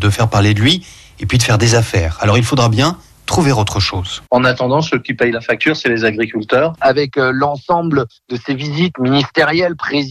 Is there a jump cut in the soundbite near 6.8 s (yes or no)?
yes